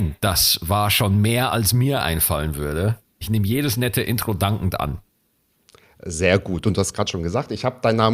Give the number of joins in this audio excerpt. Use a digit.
1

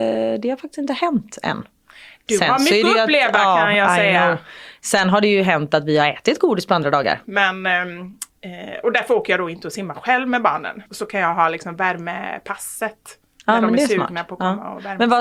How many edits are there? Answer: 2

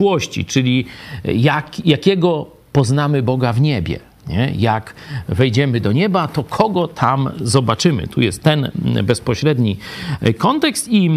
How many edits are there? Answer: 0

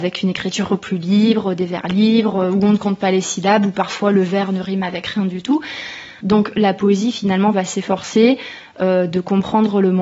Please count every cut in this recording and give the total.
1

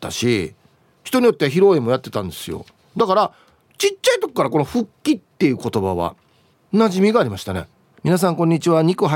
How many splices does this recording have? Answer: 1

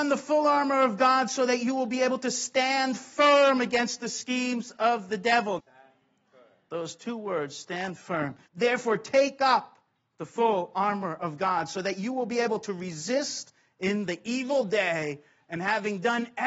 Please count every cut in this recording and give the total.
2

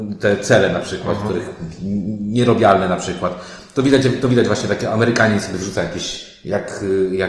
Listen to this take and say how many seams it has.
0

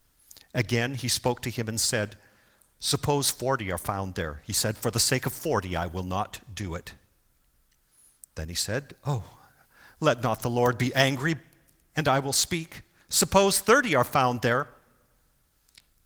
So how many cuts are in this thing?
0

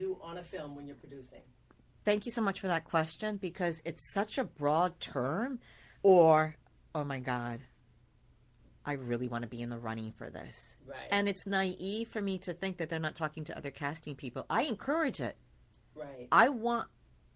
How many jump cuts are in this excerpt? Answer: 1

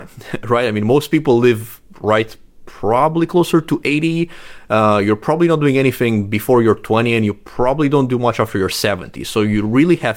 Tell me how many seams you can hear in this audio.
0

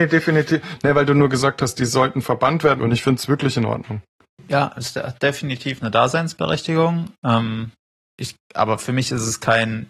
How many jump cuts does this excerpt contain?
1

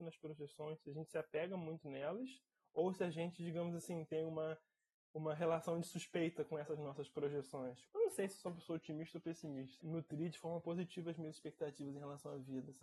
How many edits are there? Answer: 2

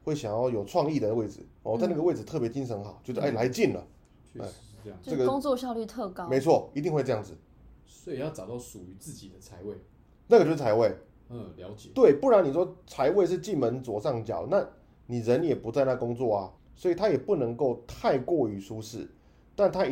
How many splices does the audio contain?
2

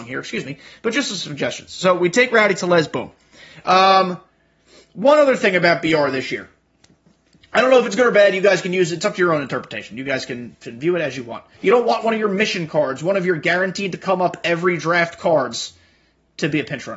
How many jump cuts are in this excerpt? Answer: 1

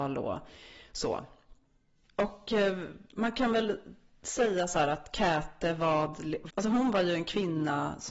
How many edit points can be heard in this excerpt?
1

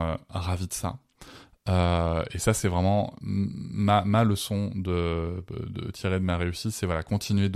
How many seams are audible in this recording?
0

